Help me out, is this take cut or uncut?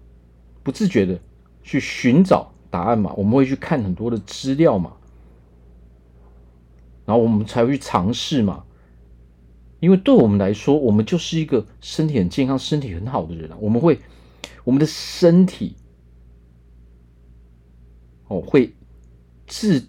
uncut